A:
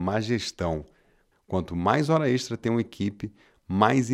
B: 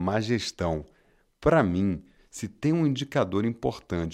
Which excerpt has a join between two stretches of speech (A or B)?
A